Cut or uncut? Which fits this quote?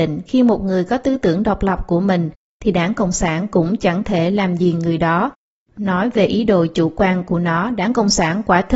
uncut